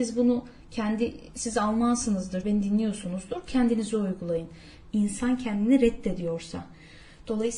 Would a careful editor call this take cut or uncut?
cut